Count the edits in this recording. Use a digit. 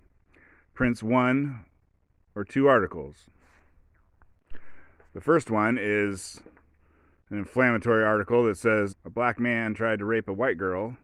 1